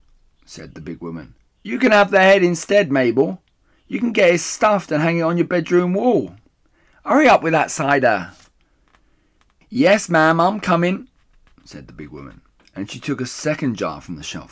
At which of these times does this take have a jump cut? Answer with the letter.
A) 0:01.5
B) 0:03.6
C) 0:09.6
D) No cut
A